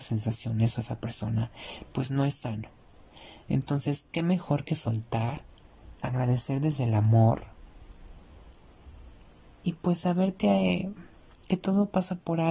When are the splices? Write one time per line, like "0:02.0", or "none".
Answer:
0:05.9